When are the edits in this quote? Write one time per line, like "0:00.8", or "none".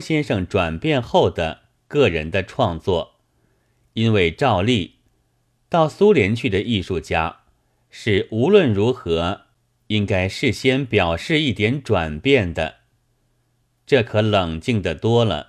none